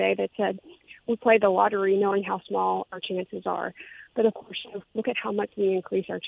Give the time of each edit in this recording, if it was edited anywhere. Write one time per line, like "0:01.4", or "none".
0:04.8